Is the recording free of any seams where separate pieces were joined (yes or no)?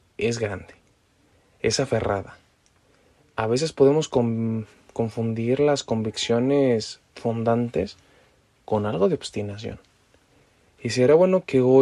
yes